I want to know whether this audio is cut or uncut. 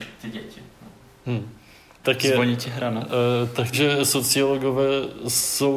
cut